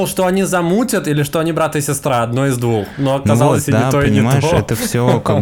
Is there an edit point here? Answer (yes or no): no